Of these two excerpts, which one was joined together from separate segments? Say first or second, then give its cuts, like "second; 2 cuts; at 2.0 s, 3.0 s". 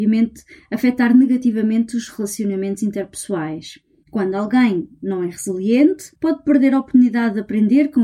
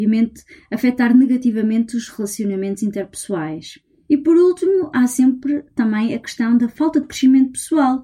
first; 2 cuts; at 4.0 s, 6.2 s